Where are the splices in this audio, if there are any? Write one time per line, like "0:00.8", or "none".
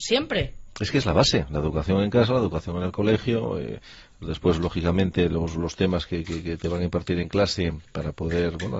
none